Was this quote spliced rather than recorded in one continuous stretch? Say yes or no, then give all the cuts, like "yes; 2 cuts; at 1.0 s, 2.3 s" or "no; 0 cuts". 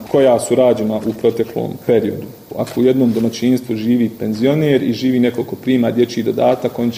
yes; 1 cut; at 2.5 s